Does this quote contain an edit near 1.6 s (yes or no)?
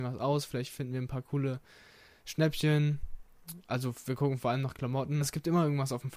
no